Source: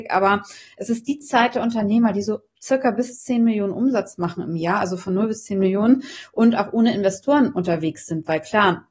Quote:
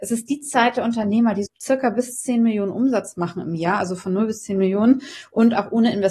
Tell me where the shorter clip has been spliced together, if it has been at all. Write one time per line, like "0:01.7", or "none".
0:01.5